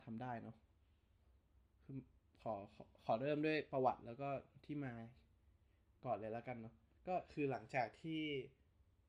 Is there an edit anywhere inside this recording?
no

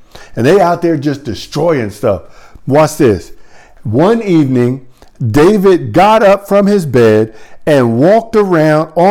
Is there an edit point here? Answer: no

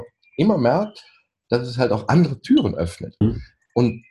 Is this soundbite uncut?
no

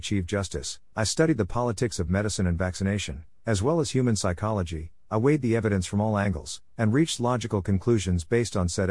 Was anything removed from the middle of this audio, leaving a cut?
no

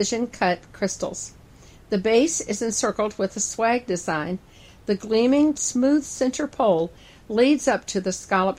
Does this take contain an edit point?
yes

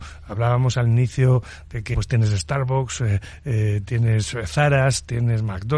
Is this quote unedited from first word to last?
no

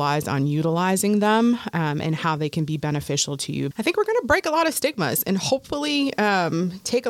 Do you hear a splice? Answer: yes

